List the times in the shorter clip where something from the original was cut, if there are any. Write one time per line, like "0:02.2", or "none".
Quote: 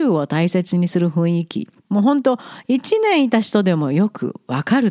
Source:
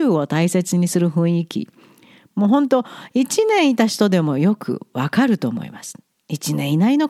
0:01.8

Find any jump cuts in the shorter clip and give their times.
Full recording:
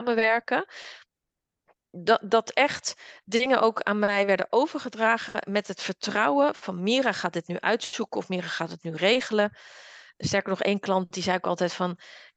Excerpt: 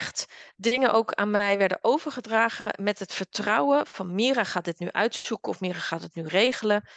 none

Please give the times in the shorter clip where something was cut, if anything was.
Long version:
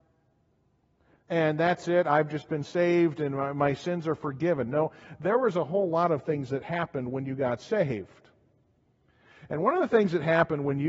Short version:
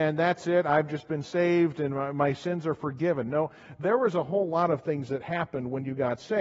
none

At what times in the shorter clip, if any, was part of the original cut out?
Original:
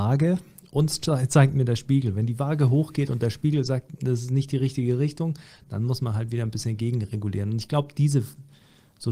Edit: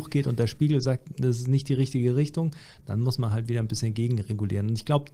none

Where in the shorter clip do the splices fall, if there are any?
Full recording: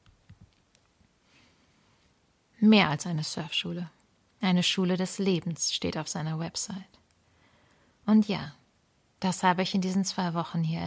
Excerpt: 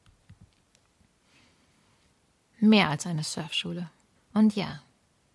0:04.2

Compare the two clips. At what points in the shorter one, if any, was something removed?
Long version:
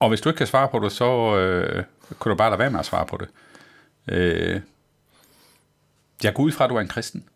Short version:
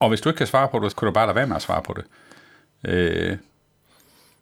0:00.9

